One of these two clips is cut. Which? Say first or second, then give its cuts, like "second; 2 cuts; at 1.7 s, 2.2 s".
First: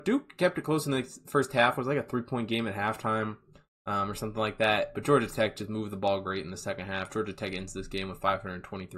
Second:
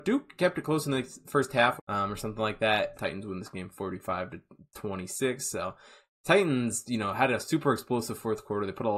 second; 2 cuts; at 1.8 s, 2.9 s